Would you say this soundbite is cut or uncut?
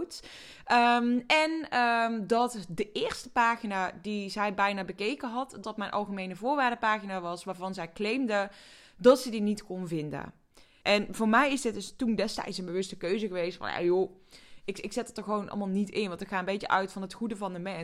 cut